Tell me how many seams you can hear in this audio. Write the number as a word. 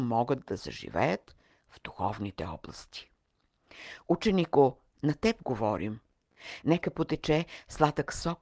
one